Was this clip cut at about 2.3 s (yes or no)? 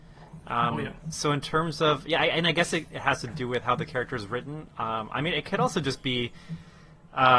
no